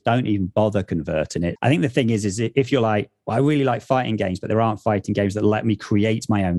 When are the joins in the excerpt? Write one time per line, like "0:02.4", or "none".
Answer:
0:01.6